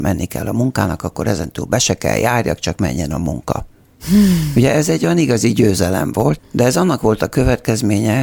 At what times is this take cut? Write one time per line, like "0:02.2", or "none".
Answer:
0:06.4